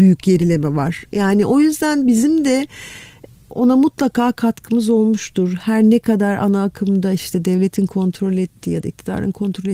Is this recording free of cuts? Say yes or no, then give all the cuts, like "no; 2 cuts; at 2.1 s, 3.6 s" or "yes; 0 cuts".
yes; 0 cuts